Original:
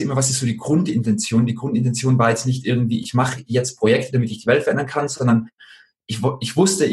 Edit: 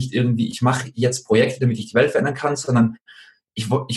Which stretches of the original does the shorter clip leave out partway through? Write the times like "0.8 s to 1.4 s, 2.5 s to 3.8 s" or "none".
none